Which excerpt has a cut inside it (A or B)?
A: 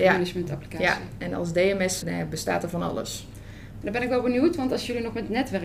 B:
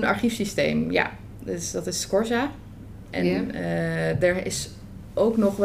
A